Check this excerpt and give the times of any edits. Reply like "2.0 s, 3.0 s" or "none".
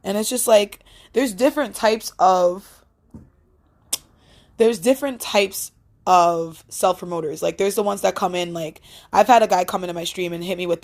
none